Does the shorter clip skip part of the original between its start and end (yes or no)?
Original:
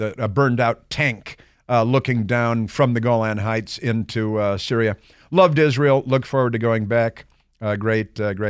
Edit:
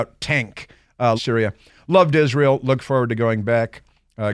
yes